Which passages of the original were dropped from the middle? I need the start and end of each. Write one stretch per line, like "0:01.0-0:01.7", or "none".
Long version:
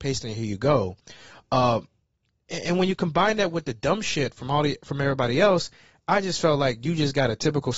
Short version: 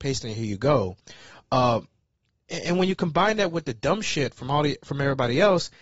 none